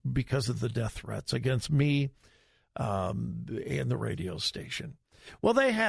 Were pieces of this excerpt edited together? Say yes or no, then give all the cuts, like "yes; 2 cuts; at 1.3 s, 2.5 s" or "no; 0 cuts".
no; 0 cuts